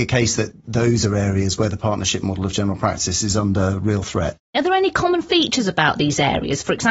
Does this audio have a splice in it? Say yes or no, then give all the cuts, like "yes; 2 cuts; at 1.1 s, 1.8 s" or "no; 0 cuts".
no; 0 cuts